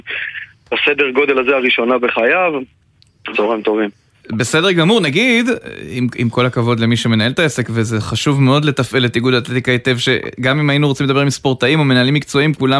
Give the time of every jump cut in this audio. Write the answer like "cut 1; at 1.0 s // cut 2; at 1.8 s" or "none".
cut 1; at 3.3 s